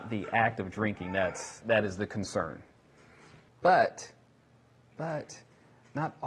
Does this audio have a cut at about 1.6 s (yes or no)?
yes